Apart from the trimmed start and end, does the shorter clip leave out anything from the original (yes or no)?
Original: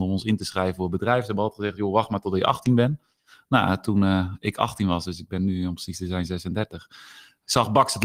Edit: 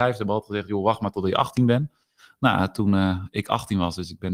no